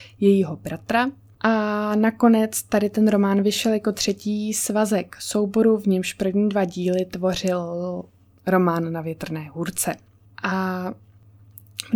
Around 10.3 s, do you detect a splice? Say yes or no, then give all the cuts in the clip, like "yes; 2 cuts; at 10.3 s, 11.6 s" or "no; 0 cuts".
yes; 2 cuts; at 1.4 s, 10.3 s